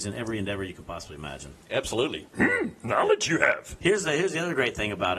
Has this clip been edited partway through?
yes; 2 cuts; at 1.6 s, 3.8 s

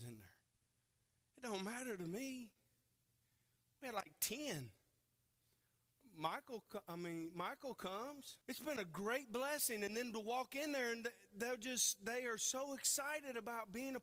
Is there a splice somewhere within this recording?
yes; 1 cut; at 8.4 s

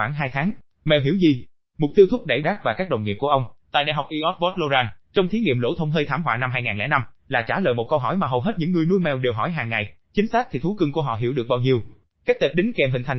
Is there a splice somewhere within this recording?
yes; 2 cuts; at 2.4 s, 12.0 s

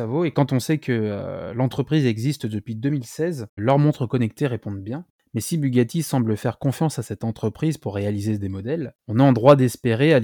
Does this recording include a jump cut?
yes; 1 cut; at 3.6 s

